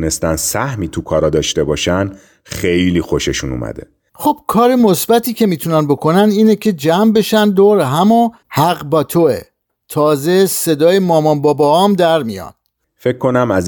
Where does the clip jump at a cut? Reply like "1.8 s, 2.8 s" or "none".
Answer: 4.1 s, 8.4 s